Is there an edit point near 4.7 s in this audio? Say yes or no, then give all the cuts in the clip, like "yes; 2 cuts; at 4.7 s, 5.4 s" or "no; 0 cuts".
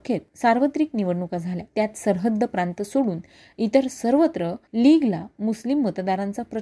yes; 2 cuts; at 1.7 s, 4.7 s